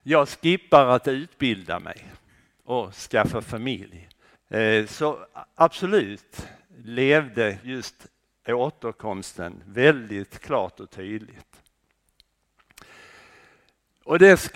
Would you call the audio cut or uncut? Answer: cut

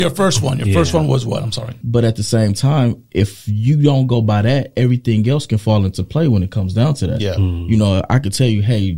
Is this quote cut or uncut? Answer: cut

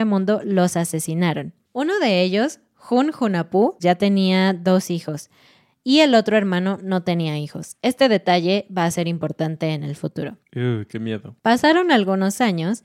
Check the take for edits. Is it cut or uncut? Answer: cut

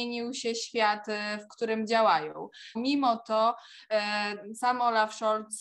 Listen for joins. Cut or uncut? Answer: cut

